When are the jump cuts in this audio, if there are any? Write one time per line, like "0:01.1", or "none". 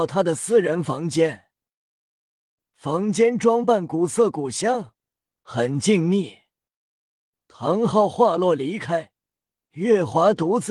0:06.8
0:09.6